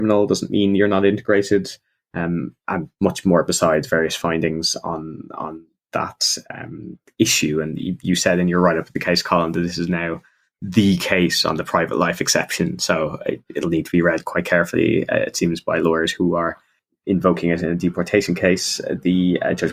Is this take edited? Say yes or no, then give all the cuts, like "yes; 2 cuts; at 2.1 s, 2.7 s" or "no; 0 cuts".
no; 0 cuts